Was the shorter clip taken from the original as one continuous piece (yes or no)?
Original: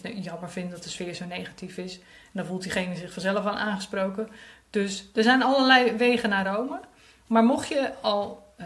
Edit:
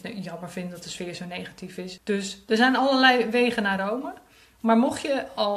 no